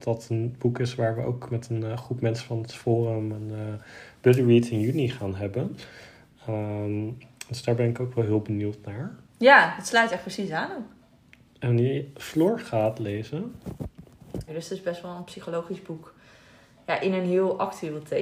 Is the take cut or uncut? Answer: cut